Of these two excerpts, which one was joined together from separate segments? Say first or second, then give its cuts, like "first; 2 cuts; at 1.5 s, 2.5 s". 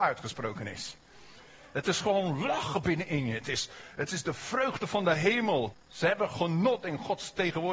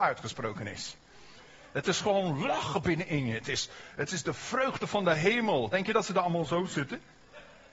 first; 1 cut; at 5.7 s